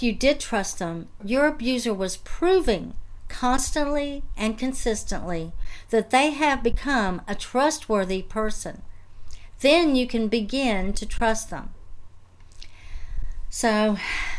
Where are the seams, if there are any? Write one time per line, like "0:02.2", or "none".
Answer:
0:01.2